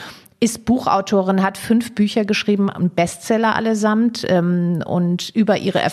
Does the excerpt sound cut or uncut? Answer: uncut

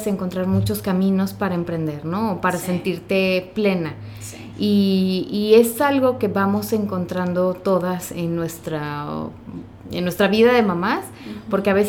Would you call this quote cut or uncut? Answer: uncut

